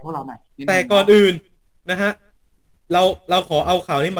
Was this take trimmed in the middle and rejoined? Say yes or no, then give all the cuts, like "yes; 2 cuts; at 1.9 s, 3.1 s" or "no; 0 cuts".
no; 0 cuts